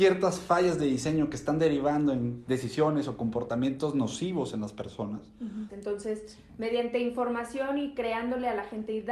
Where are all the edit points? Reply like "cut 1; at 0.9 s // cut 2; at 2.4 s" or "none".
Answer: cut 1; at 5.7 s